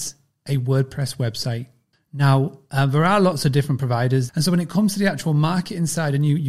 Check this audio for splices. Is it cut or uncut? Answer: cut